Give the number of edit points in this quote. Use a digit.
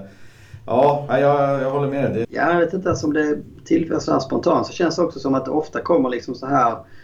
2